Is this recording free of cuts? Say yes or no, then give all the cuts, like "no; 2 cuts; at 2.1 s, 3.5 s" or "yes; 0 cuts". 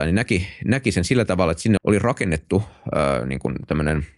no; 1 cut; at 1.8 s